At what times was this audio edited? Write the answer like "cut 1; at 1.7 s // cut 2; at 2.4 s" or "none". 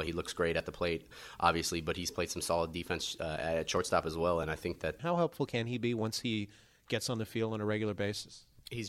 cut 1; at 5.0 s

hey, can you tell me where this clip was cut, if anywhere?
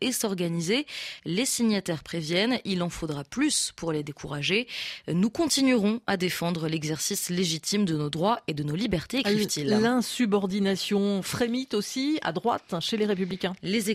none

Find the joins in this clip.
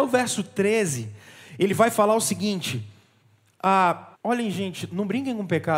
cut 1; at 4.1 s

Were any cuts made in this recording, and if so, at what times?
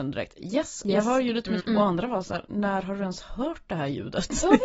cut 1; at 1.6 s

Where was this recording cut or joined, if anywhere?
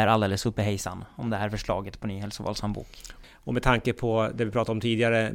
cut 1; at 3.2 s

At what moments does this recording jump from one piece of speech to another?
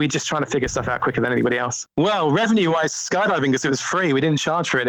cut 1; at 1.9 s

